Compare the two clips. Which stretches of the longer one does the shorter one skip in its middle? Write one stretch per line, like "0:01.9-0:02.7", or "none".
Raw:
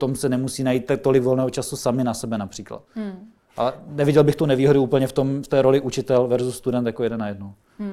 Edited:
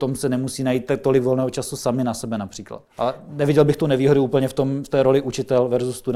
0:02.9-0:03.5